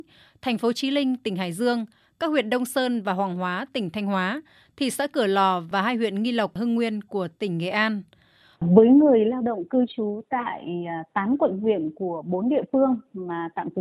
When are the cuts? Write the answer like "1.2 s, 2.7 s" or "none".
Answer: 8.5 s